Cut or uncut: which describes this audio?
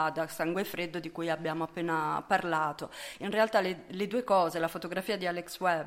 uncut